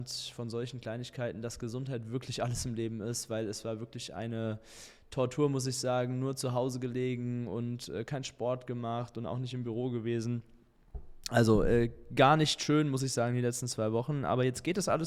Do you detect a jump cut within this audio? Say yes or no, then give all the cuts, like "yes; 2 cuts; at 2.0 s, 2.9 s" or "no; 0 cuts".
no; 0 cuts